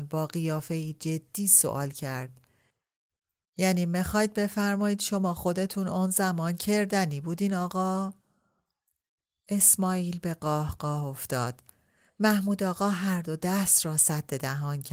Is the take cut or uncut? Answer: uncut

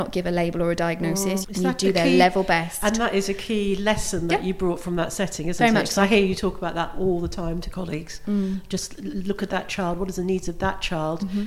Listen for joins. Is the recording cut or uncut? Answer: cut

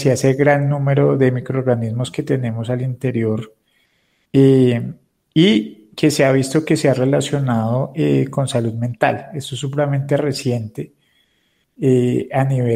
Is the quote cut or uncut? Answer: uncut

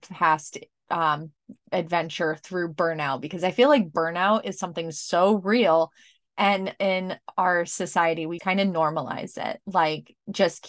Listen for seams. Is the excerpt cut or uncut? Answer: cut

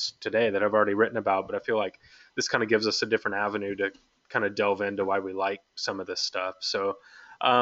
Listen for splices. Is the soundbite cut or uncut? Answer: uncut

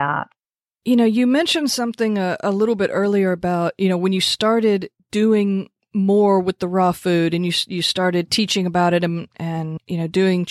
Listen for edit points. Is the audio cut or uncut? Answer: uncut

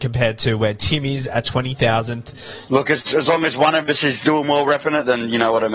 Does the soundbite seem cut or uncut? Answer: cut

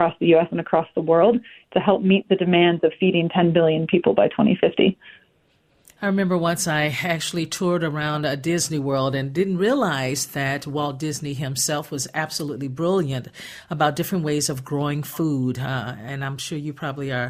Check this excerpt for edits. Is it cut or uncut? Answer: uncut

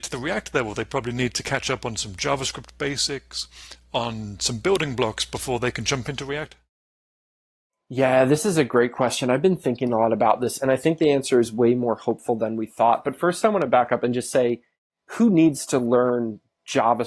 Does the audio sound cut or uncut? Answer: uncut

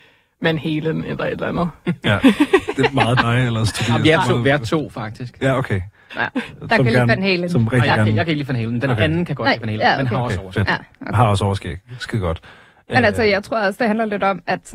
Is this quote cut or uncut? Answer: uncut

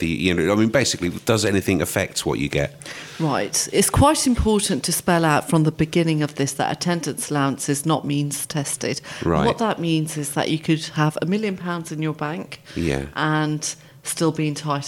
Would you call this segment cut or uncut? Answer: uncut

